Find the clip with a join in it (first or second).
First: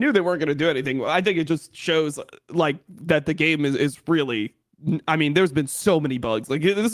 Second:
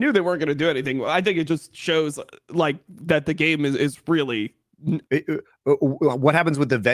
second